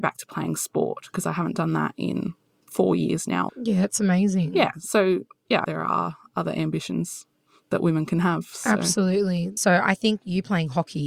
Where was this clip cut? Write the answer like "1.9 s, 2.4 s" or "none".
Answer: none